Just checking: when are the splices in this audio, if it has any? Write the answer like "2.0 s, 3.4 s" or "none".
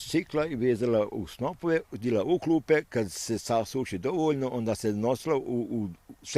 none